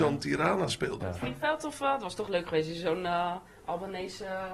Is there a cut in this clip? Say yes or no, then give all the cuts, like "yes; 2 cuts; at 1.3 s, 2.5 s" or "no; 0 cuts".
yes; 1 cut; at 1.0 s